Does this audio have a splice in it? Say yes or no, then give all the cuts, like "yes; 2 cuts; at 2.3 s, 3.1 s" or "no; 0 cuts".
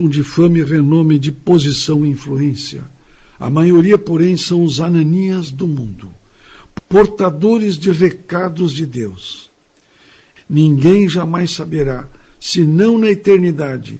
no; 0 cuts